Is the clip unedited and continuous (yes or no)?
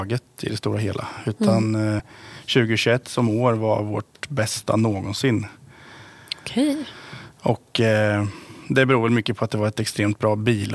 yes